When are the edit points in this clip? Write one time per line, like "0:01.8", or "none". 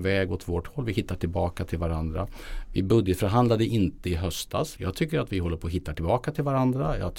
0:04.8